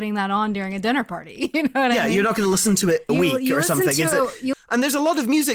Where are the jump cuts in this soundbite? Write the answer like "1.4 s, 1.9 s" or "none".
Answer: 3.1 s, 4.5 s